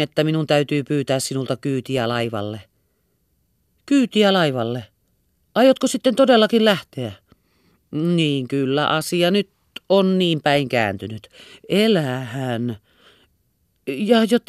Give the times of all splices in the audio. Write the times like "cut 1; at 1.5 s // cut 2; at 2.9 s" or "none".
none